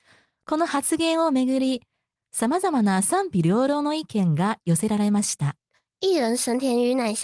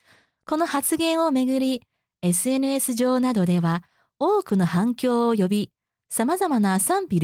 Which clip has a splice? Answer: first; 1 cut; at 2.2 s

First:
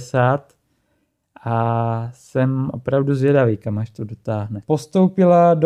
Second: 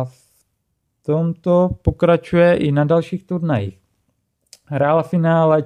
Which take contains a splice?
first; 1 cut; at 4.6 s

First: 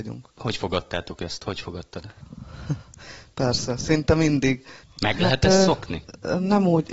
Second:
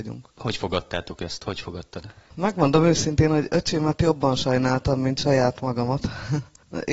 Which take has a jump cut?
first; 2 cuts; at 2.2 s, 4.8 s

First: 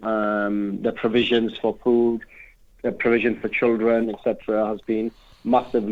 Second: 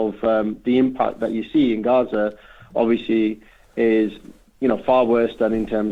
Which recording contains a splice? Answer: first; 1 cut; at 4.0 s

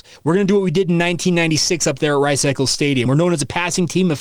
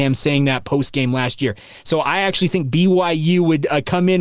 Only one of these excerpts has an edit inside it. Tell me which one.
first; 1 cut; at 3.1 s

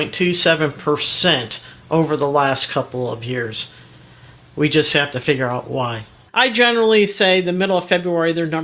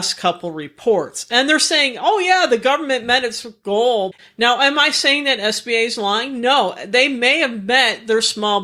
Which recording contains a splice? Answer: first; 1 cut; at 6.3 s

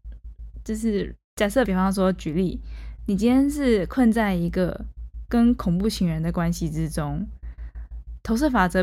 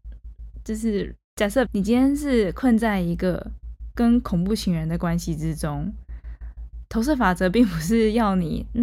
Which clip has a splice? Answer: second; 1 cut; at 1.7 s

